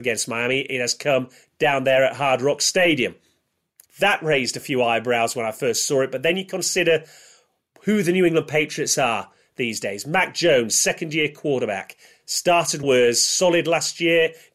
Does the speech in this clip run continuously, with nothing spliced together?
no; 2 cuts; at 3.9 s, 12.8 s

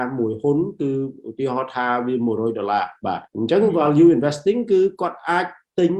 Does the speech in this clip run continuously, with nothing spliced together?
no; 1 cut; at 3.3 s

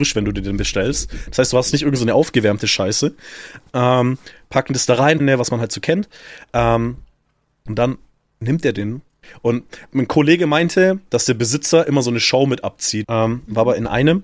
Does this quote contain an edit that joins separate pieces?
yes; 2 cuts; at 5.2 s, 13.0 s

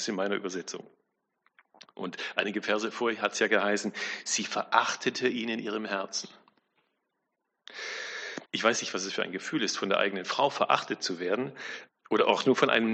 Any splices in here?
yes; 2 cuts; at 8.5 s, 11.9 s

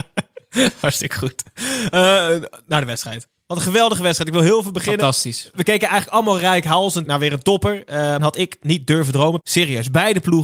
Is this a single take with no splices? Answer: no; 3 cuts; at 7.1 s, 8.2 s, 9.4 s

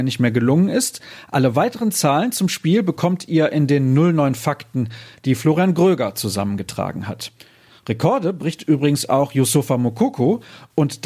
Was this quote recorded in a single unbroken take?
yes; 0 cuts

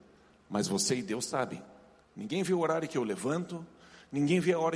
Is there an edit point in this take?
yes; 1 cut; at 2.0 s

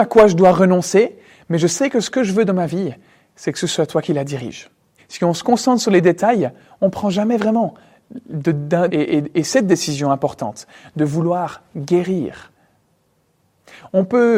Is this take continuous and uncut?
no; 2 cuts; at 5.0 s, 8.9 s

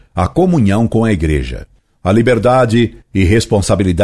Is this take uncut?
yes; 0 cuts

